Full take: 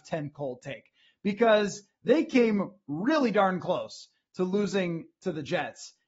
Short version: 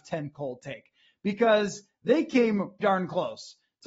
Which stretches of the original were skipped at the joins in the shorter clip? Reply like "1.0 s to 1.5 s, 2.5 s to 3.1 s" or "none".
2.8 s to 3.3 s